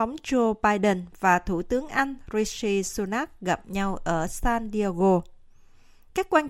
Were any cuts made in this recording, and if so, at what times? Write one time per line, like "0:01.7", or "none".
none